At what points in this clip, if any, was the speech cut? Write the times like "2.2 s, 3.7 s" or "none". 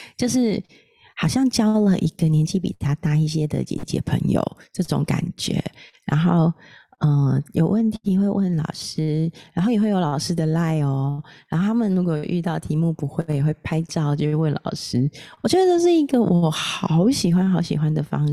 none